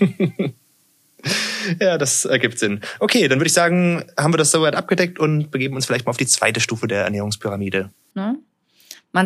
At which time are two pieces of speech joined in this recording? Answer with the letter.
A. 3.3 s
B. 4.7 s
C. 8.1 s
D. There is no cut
C